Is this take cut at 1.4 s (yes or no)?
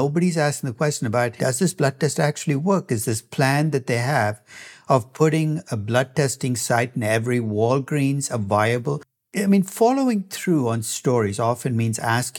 yes